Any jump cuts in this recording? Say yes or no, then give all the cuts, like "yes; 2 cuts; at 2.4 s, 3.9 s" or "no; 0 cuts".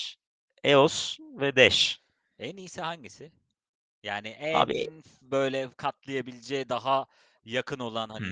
no; 0 cuts